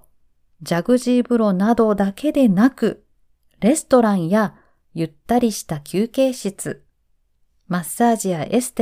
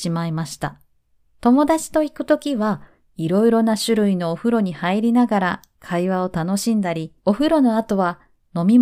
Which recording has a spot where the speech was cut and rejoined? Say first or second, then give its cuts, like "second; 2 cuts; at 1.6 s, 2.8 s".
second; 2 cuts; at 1.3 s, 7.2 s